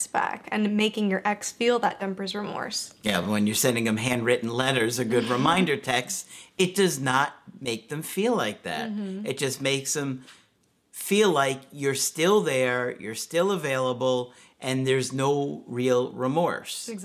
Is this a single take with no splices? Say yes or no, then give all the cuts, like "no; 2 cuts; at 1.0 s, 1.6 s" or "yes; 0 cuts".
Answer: yes; 0 cuts